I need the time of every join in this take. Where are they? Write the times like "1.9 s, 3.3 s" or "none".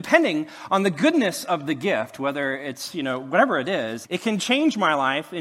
4.0 s